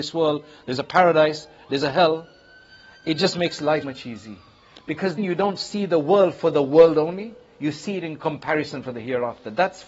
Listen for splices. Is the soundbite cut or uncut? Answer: cut